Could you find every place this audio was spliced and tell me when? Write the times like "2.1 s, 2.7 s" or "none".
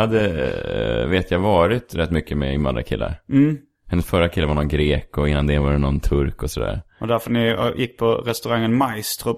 none

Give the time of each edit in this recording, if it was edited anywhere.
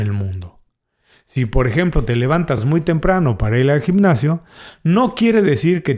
none

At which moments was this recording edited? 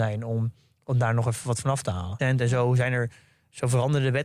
2.2 s

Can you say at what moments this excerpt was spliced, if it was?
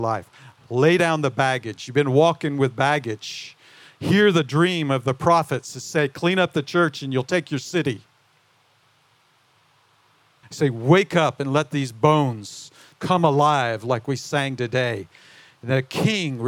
10.4 s

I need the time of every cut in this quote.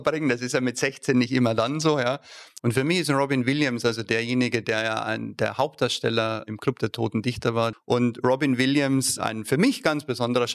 2.6 s, 7.7 s

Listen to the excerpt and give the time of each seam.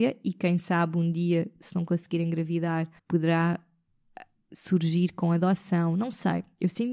3.0 s

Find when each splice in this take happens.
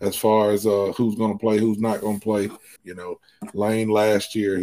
2.8 s

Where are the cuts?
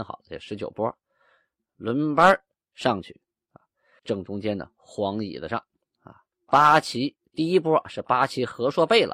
4.0 s, 6.3 s

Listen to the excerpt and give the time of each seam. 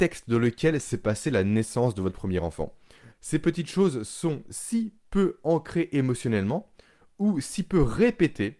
3.1 s

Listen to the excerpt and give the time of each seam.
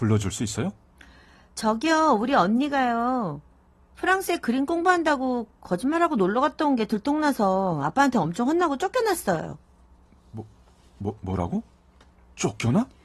none

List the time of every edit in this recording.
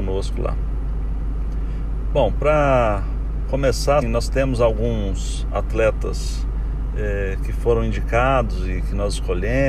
4.0 s

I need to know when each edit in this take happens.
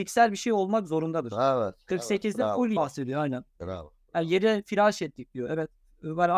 2.8 s

